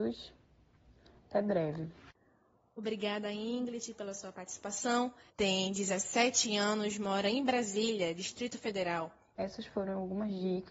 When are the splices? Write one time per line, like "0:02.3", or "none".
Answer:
0:05.3
0:09.3